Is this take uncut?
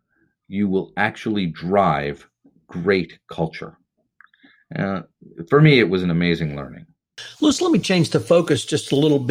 yes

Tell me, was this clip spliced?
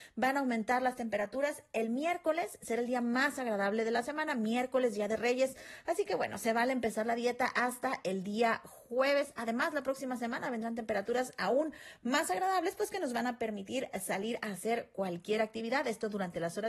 no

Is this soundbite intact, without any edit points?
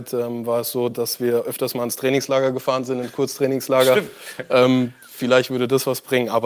yes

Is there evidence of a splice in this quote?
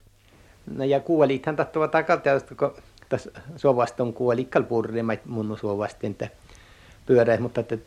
no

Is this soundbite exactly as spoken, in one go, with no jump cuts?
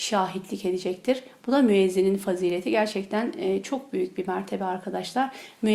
yes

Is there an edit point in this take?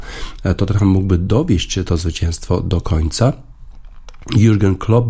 no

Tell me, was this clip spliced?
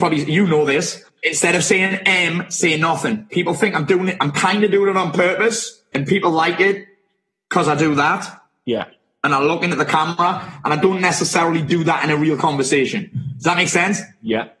no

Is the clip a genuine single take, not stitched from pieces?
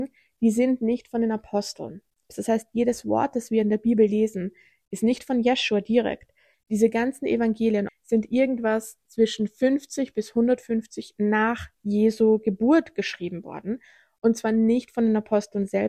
no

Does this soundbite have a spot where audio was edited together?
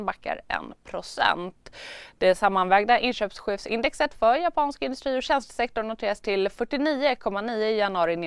no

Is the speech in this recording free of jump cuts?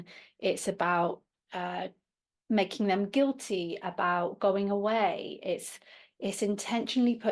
yes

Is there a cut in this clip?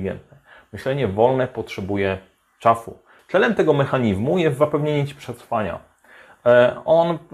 yes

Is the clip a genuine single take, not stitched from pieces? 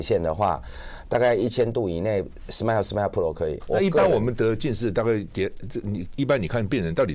no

